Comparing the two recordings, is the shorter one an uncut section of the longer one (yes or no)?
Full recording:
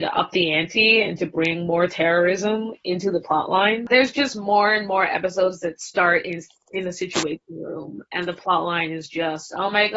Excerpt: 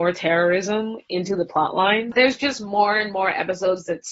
yes